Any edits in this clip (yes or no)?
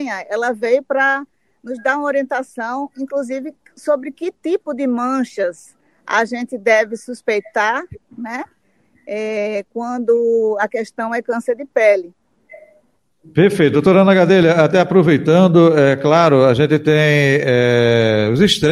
yes